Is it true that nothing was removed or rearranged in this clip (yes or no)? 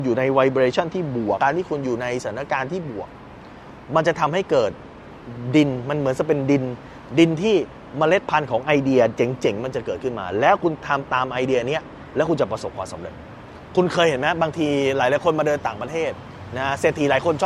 no